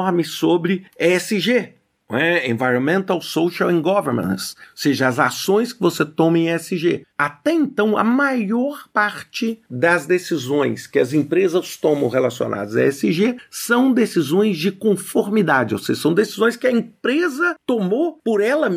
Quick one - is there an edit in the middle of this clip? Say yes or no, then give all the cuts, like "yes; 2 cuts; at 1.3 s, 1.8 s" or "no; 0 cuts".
yes; 1 cut; at 7.1 s